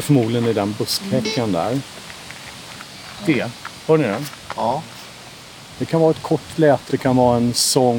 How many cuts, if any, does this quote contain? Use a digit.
2